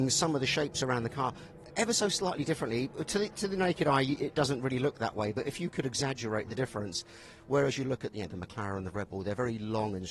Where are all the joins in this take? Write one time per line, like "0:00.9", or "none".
0:08.3